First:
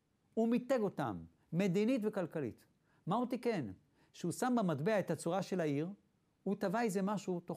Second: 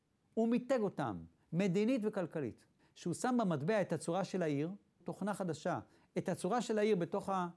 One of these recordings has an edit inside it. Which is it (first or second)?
second